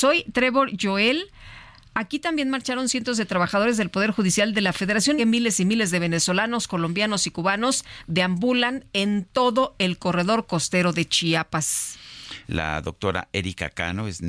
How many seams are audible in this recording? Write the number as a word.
two